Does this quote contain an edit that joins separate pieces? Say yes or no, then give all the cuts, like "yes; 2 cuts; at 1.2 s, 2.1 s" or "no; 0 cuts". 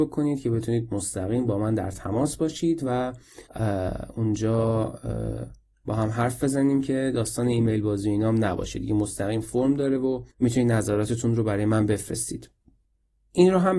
yes; 2 cuts; at 3.5 s, 10.3 s